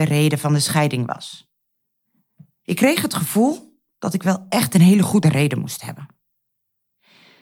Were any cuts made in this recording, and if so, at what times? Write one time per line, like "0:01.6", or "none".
none

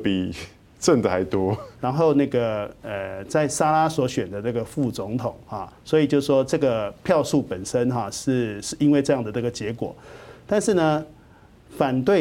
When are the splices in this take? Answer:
0:01.7
0:05.8

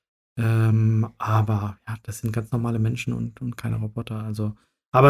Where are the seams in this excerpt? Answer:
none

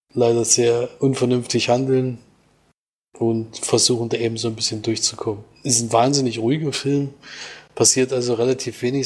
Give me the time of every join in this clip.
none

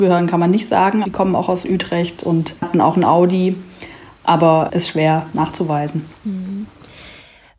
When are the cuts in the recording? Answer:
0:01.0
0:02.6

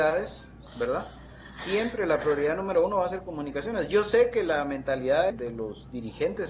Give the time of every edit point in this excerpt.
0:05.3

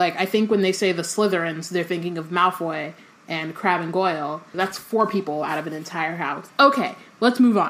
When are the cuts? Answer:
0:04.5
0:06.5

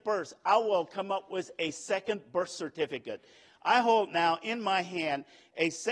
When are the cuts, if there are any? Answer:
none

